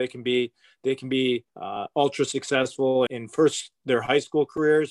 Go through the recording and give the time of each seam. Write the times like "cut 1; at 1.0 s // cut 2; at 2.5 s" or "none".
cut 1; at 1.5 s // cut 2; at 3.1 s